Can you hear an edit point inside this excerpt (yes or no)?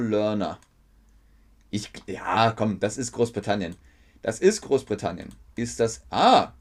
yes